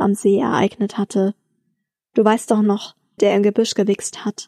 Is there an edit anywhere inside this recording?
yes; 1 cut; at 3.2 s

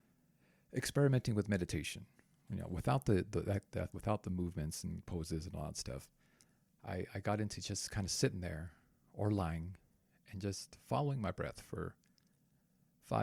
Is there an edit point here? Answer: yes; 1 cut; at 3.9 s

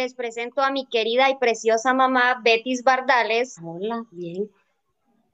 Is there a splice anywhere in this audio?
yes; 1 cut; at 3.6 s

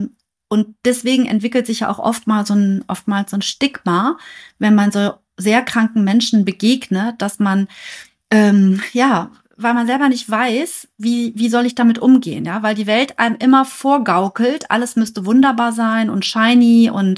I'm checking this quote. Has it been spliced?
no; 0 cuts

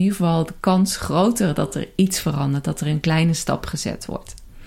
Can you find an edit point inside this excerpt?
no; 0 cuts

